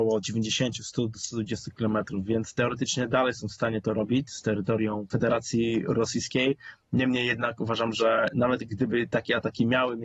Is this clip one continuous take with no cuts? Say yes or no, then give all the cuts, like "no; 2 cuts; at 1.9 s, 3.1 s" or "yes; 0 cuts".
yes; 0 cuts